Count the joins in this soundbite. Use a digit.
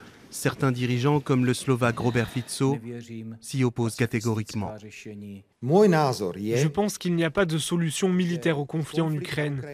0